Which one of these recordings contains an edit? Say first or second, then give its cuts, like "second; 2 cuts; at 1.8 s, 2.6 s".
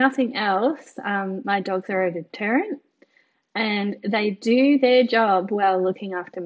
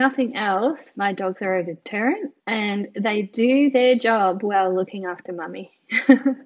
second; 2 cuts; at 0.9 s, 2.4 s